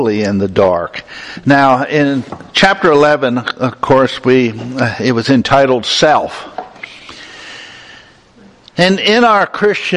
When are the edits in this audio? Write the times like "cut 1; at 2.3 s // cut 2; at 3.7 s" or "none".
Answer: none